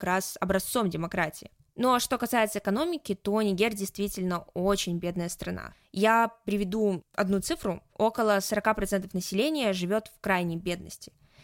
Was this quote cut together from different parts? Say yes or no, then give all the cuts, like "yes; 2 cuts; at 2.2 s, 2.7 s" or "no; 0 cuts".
no; 0 cuts